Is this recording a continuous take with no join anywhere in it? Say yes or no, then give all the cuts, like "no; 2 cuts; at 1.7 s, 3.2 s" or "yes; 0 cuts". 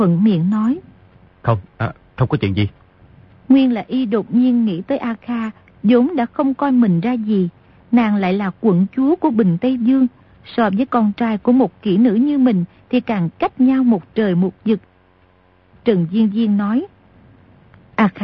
yes; 0 cuts